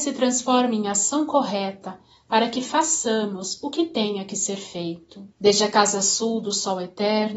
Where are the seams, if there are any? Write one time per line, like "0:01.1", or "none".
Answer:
0:05.3